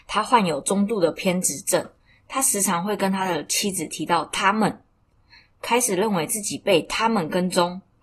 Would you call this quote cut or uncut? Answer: uncut